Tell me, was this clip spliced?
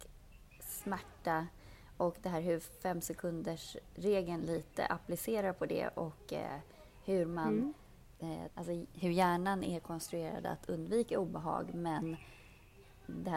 yes; 1 cut; at 8.5 s

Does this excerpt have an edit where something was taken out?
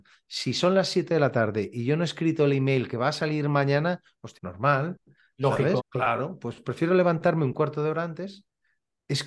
yes; 2 cuts; at 4.4 s, 5.8 s

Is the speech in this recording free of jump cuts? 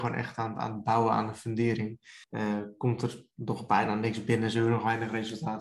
no; 1 cut; at 2.2 s

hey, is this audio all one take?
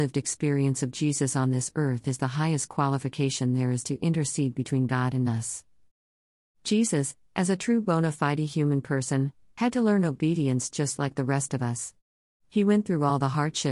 yes; 0 cuts

